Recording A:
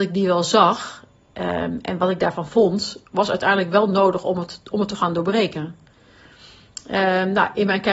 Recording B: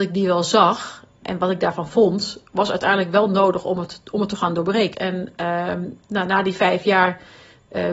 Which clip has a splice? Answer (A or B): B